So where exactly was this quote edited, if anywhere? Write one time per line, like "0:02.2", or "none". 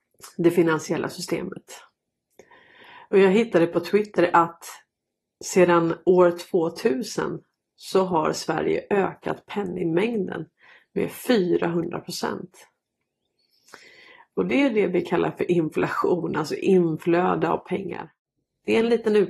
none